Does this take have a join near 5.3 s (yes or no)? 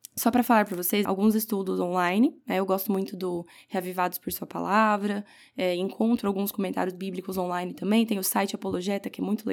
no